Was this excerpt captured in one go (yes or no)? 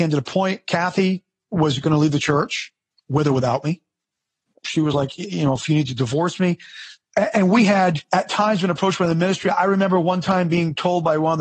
yes